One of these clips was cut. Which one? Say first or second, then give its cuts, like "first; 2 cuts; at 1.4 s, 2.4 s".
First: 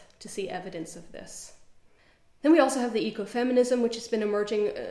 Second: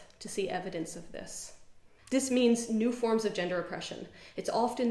second; 1 cut; at 2.0 s